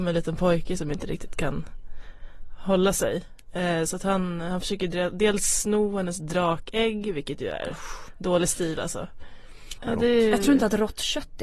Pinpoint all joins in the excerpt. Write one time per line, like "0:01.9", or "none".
0:09.8